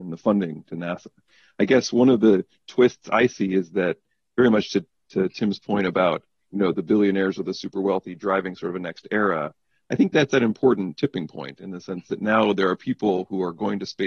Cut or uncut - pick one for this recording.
uncut